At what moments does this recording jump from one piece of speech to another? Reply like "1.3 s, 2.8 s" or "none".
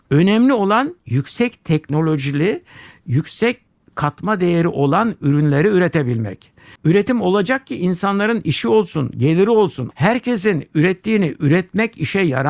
6.8 s, 9.9 s